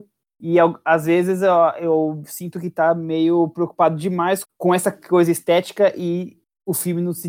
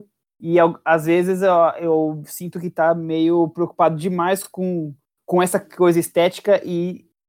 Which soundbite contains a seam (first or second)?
first